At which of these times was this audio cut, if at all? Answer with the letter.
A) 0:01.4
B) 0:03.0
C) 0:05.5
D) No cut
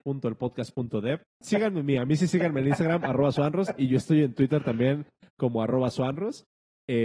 A